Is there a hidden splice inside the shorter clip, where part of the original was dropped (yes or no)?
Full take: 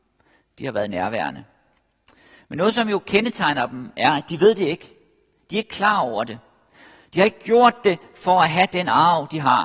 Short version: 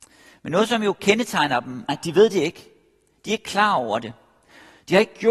yes